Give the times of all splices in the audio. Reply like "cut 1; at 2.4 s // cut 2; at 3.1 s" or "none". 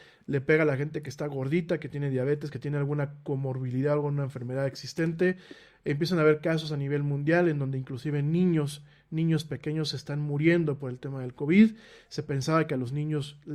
none

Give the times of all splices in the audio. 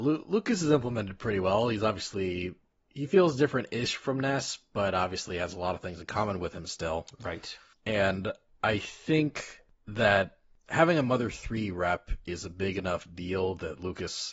cut 1; at 7.8 s

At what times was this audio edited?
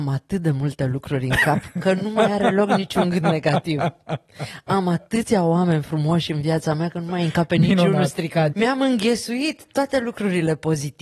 cut 1; at 8.5 s

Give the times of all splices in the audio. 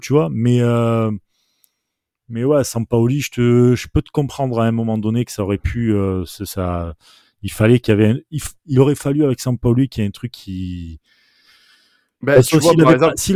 none

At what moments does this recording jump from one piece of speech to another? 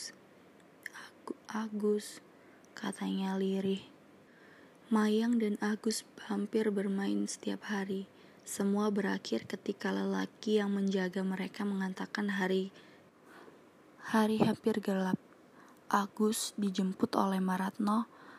none

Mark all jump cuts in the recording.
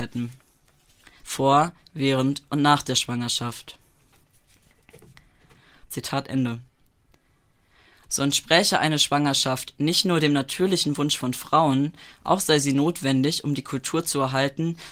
cut 1; at 1.2 s // cut 2; at 5.8 s // cut 3; at 8.1 s

